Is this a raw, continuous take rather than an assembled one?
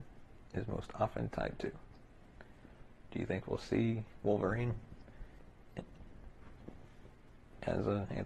no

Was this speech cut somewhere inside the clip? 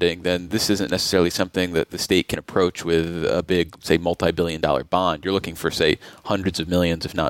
no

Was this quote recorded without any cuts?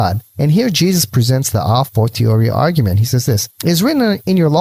yes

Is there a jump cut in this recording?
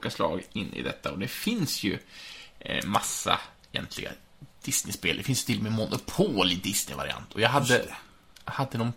no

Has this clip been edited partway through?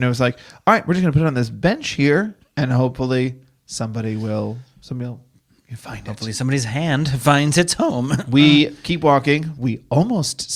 no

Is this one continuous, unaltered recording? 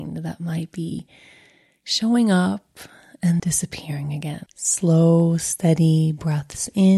no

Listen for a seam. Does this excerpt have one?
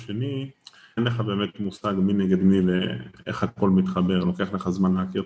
yes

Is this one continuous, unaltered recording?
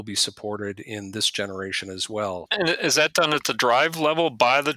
no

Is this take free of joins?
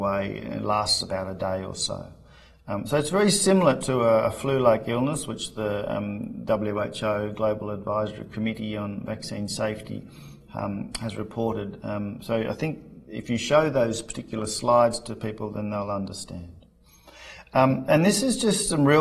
yes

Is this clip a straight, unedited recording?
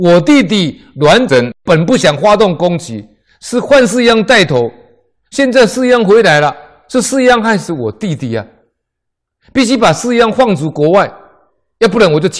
yes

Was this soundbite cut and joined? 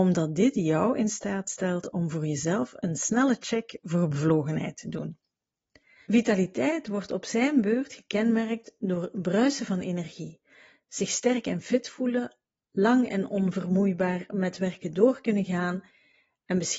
yes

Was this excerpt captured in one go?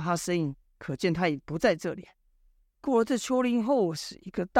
yes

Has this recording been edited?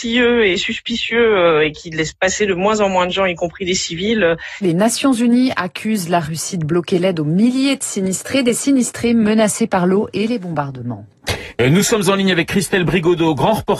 yes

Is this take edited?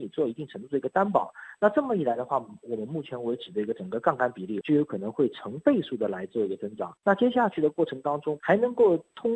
yes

